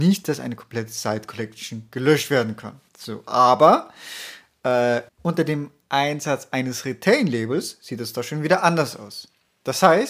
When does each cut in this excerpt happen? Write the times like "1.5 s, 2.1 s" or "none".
2.9 s, 5.1 s